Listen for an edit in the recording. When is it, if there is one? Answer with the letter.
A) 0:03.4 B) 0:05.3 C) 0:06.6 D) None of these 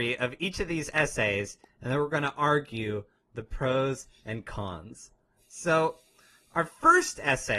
D